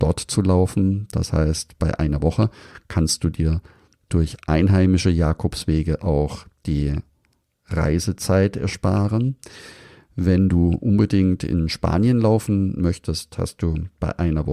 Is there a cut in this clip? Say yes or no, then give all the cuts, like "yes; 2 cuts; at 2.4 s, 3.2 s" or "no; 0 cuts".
no; 0 cuts